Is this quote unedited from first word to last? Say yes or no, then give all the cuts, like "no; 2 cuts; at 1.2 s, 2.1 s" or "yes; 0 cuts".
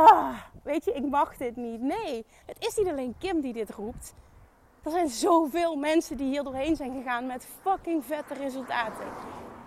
no; 1 cut; at 2.4 s